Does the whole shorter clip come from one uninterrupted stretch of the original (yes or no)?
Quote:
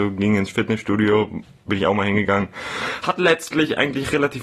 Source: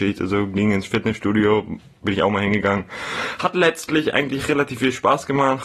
yes